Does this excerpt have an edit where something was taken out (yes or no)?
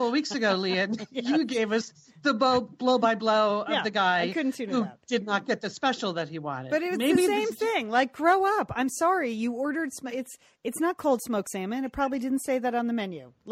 no